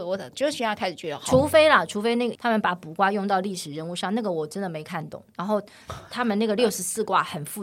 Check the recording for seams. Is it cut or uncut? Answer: cut